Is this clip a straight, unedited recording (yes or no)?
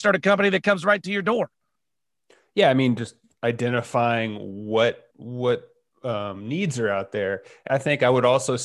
no